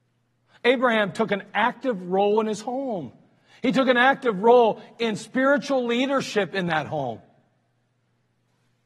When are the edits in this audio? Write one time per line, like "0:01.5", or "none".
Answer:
none